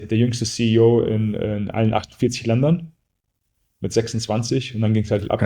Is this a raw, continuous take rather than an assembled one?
yes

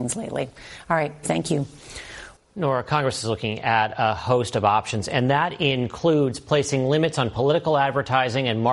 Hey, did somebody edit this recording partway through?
yes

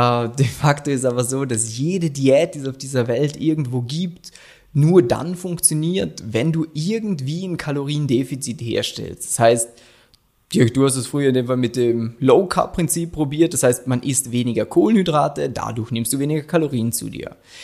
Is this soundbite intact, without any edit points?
yes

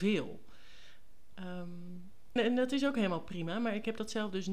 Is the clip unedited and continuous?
no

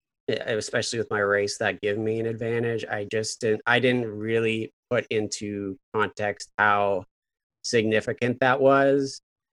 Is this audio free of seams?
yes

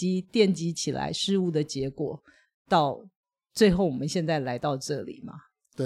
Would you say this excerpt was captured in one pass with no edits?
yes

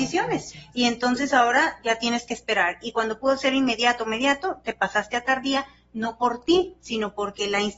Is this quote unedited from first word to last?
yes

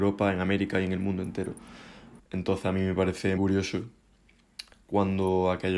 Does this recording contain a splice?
yes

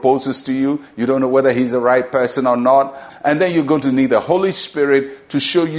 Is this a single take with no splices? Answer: no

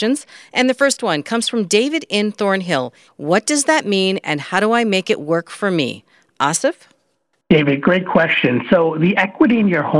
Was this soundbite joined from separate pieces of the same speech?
yes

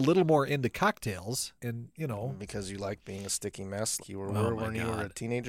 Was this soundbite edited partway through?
yes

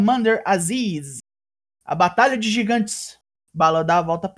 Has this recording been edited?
yes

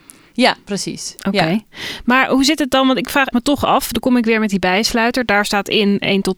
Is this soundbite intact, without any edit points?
yes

